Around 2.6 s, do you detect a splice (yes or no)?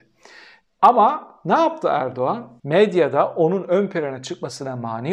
yes